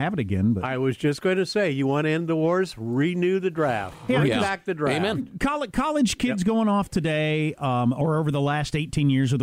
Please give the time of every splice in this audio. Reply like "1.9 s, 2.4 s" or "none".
none